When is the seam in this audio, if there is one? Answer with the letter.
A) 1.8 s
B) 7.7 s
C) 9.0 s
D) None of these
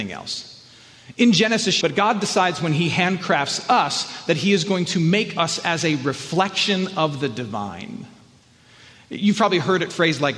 A